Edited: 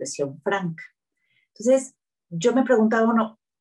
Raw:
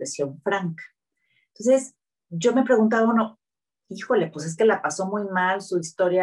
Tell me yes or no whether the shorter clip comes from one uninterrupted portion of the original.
yes